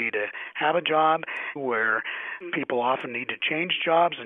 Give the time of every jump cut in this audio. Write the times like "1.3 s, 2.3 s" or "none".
1.6 s